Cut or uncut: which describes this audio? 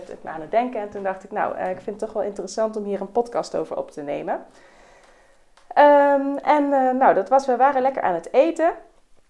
uncut